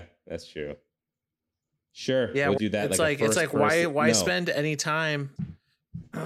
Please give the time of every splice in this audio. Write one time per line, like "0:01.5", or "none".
0:02.6
0:05.4

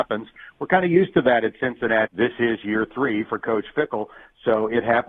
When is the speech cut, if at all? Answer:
0:02.1

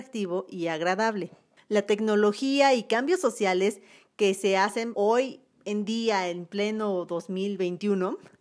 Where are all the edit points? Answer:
0:01.6
0:04.9

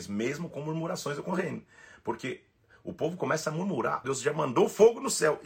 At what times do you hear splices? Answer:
0:04.0

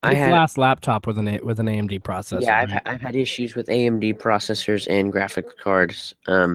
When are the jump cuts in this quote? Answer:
none

